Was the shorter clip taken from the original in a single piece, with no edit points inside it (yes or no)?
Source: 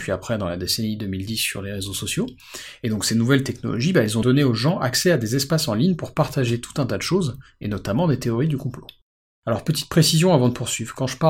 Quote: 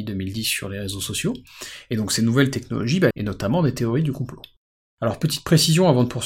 no